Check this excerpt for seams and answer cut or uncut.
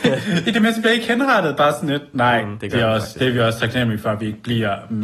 cut